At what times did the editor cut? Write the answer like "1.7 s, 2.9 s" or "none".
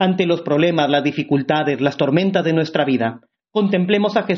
none